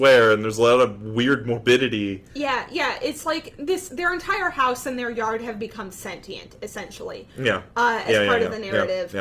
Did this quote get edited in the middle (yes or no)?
no